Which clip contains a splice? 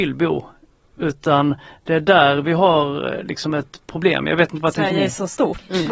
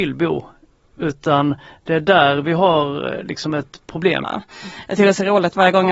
second; 1 cut; at 4.2 s

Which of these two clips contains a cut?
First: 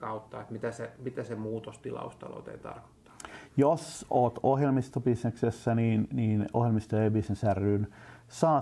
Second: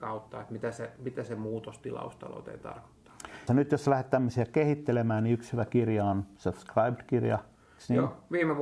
second; 1 cut; at 3.5 s

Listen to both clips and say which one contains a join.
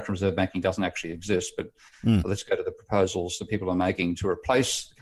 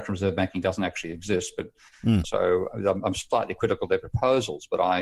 second; 1 cut; at 2.2 s

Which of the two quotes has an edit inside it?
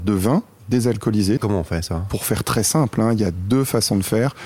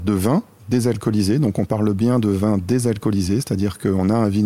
first; 1 cut; at 1.4 s

